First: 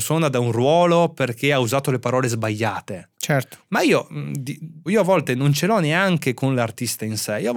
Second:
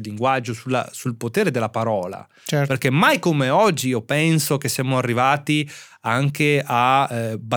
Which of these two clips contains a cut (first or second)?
first